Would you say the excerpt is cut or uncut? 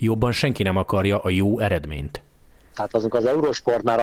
cut